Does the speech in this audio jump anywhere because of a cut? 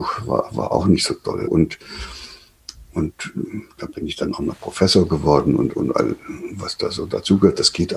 yes; 1 cut; at 1.5 s

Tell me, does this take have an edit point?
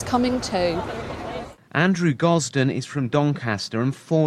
no; 0 cuts

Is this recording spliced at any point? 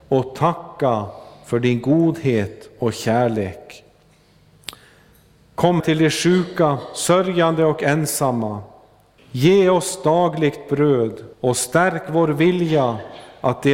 yes; 3 cuts; at 5.8 s, 9.2 s, 11.3 s

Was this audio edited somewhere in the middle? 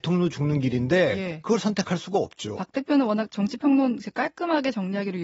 yes; 1 cut; at 2.6 s

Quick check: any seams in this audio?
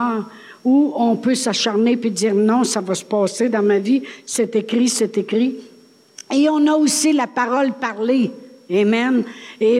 no; 0 cuts

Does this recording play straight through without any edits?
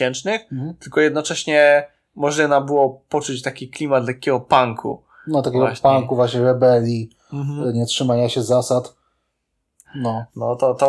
no; 1 cut; at 9.8 s

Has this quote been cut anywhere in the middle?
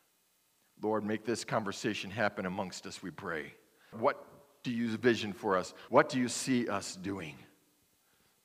yes; 2 cuts; at 3.9 s, 5.9 s

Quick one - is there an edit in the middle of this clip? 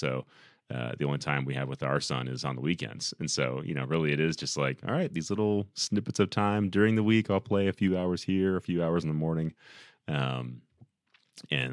no; 0 cuts

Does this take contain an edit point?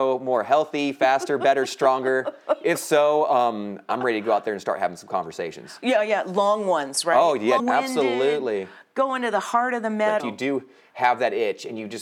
yes; 2 cuts; at 7.6 s, 10.2 s

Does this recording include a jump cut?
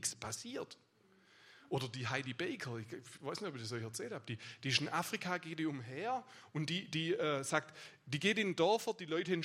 no; 0 cuts

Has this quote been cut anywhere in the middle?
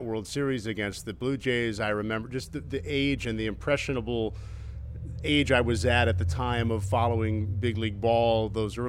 no; 0 cuts

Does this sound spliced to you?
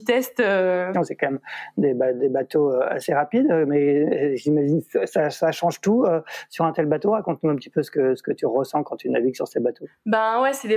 yes; 1 cut; at 0.9 s

